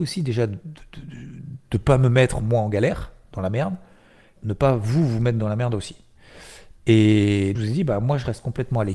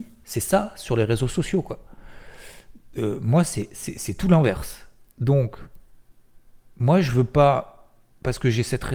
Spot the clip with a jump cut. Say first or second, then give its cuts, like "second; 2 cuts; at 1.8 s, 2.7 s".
first; 2 cuts; at 4.4 s, 7.5 s